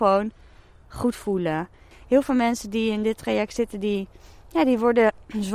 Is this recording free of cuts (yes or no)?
no